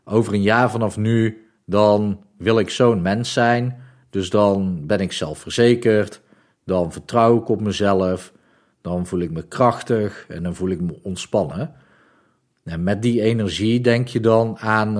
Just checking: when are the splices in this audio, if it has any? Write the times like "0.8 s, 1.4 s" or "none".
none